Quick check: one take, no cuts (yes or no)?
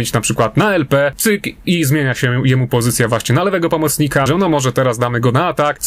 no